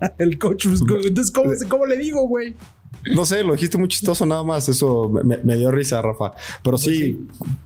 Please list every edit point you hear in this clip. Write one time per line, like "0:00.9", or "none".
none